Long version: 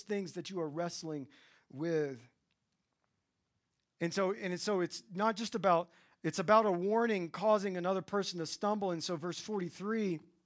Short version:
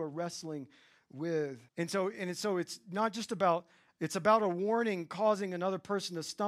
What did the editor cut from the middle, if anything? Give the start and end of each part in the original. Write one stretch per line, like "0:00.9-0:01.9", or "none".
0:02.3-0:03.9